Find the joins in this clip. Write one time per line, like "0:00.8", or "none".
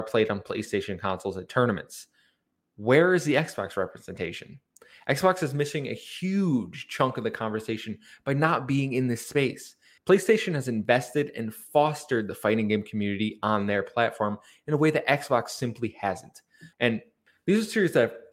0:10.0
0:16.7